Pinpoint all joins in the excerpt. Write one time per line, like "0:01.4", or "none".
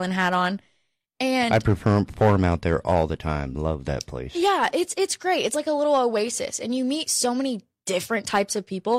none